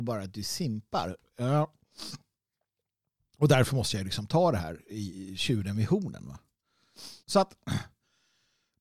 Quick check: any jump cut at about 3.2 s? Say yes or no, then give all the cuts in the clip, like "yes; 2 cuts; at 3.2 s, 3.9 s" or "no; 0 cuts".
no; 1 cut; at 7.2 s